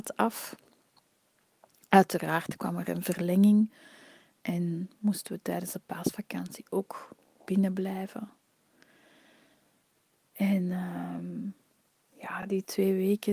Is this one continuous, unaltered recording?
yes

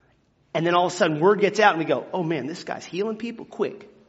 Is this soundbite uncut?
yes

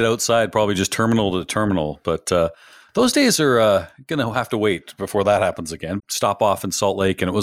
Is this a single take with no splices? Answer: no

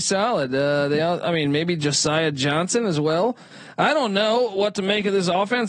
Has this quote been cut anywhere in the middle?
no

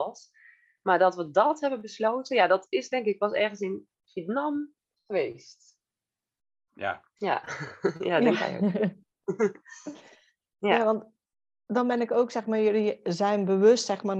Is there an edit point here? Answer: no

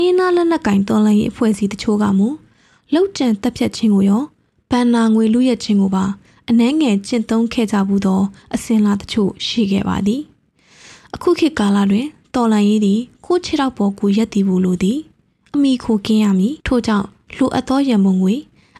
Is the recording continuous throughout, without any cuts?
no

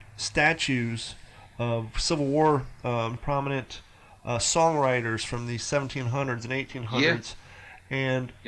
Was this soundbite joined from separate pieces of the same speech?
yes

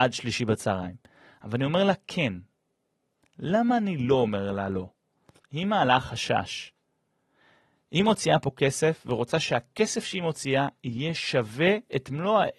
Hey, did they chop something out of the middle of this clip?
yes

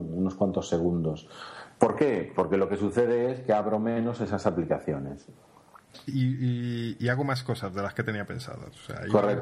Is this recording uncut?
no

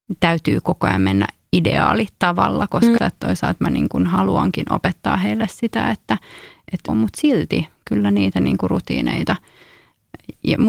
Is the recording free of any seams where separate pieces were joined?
no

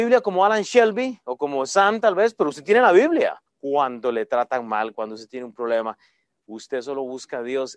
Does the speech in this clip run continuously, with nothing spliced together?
no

